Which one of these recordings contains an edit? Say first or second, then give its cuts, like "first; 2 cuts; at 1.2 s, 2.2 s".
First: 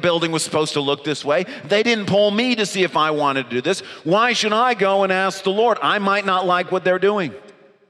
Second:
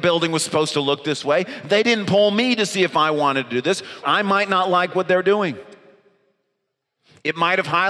second; 1 cut; at 4.0 s